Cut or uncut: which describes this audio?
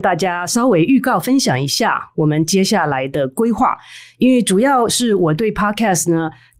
uncut